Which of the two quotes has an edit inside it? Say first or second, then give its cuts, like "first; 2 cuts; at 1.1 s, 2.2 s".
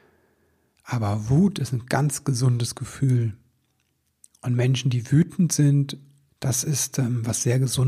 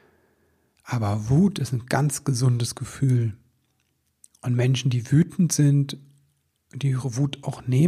first; 1 cut; at 6.3 s